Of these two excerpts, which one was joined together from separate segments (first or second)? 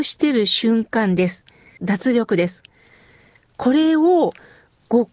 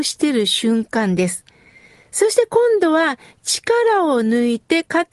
first